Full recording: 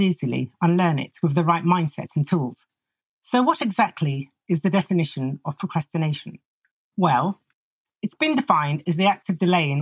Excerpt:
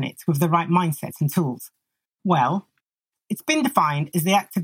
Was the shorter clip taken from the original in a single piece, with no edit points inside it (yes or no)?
no